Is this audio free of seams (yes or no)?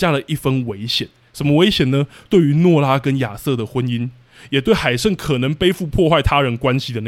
yes